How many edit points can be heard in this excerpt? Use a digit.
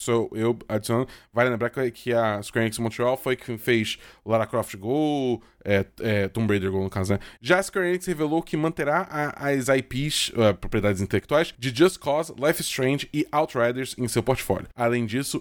1